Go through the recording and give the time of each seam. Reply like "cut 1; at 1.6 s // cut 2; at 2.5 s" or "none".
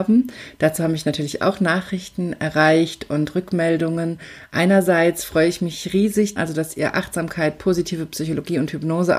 cut 1; at 6.4 s